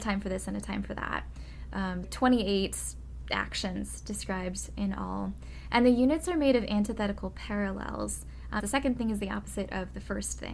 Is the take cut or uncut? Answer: cut